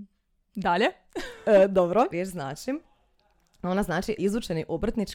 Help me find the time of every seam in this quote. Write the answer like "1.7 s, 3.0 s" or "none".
2.1 s, 4.2 s